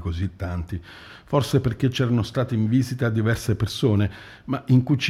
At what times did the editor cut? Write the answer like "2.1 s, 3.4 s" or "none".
none